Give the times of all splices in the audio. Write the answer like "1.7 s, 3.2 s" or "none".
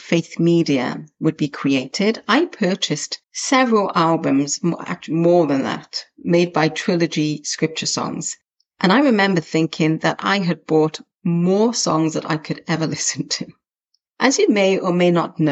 3.2 s